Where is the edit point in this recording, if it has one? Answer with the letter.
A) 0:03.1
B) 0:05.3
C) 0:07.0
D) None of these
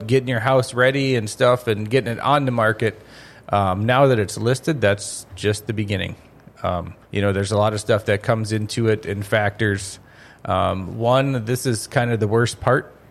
C